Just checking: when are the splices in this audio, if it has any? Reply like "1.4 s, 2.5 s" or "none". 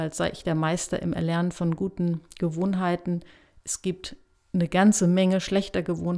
none